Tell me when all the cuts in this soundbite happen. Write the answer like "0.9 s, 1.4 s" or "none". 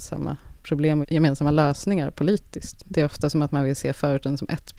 1.0 s, 2.8 s